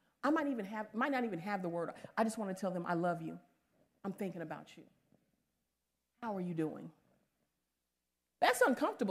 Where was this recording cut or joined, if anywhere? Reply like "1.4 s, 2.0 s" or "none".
none